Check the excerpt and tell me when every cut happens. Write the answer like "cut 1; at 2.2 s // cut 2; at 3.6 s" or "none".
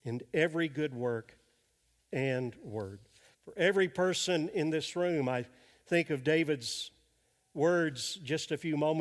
cut 1; at 3.3 s